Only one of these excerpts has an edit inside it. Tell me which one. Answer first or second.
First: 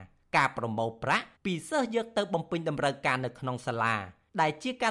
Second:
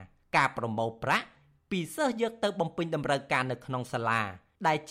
first